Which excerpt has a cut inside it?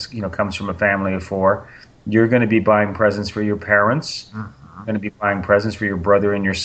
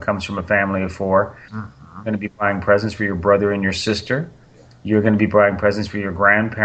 second; 1 cut; at 1.5 s

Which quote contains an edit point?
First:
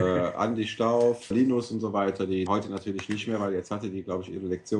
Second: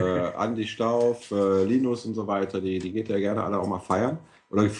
first; 2 cuts; at 1.3 s, 2.5 s

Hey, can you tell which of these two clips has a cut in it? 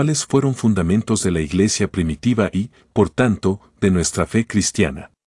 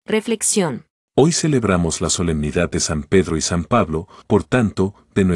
second; 2 cuts; at 1.1 s, 4.2 s

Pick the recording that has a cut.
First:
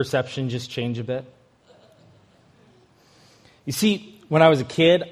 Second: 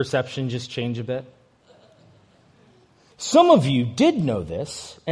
second; 1 cut; at 3.1 s

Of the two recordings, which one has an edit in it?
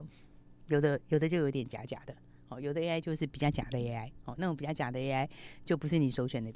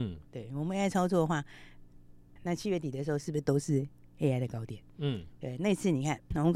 second; 1 cut; at 2.4 s

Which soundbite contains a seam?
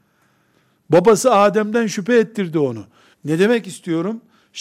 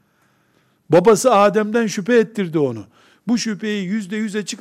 first; 1 cut; at 3.1 s

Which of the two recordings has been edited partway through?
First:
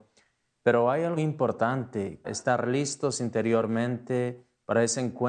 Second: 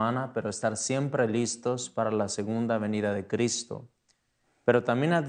first; 2 cuts; at 1.2 s, 2.2 s

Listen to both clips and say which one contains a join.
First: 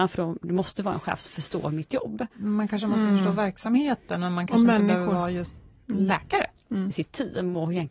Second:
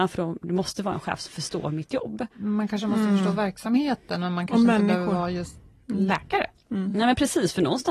first; 1 cut; at 6.9 s

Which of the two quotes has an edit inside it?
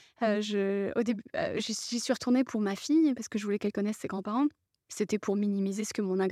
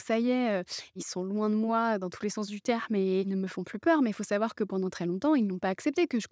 first; 1 cut; at 4.9 s

